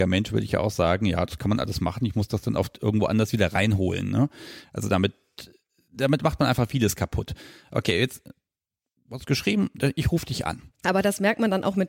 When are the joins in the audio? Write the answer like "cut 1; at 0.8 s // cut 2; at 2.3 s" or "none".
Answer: cut 1; at 10.7 s